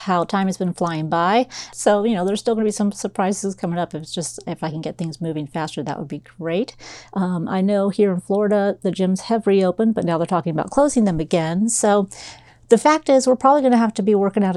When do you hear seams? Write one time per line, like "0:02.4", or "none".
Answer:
0:01.7
0:07.1